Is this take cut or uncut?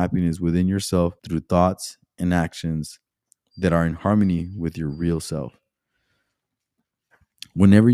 cut